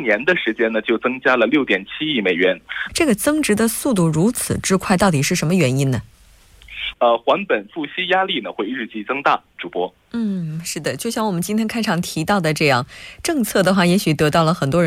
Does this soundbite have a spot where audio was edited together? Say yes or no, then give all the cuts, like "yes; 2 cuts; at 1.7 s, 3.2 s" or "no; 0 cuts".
yes; 2 cuts; at 2.9 s, 6.9 s